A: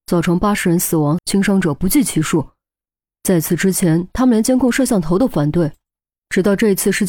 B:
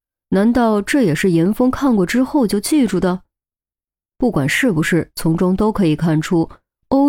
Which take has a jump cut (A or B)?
A